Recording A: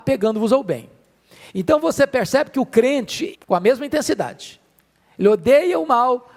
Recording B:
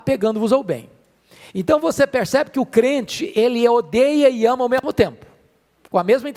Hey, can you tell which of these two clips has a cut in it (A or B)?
A